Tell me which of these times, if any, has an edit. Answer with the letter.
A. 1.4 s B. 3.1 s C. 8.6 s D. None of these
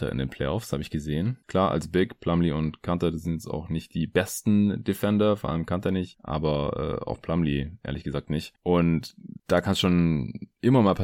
A